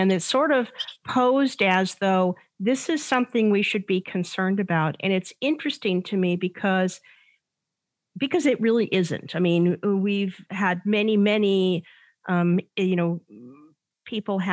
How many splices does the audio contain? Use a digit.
1